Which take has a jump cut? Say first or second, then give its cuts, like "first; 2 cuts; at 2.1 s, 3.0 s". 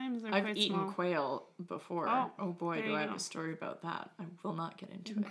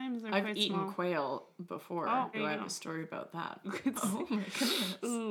second; 2 cuts; at 2.3 s, 3.6 s